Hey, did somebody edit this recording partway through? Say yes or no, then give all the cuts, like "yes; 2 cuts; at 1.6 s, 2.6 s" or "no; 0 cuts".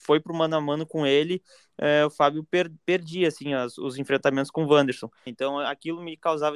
yes; 1 cut; at 5.3 s